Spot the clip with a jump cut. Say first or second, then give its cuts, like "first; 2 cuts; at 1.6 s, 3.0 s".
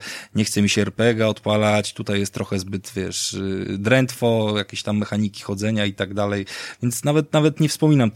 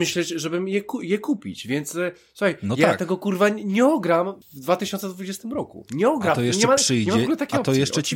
second; 1 cut; at 4.4 s